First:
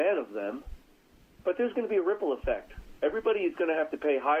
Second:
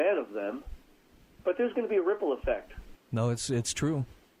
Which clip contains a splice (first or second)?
second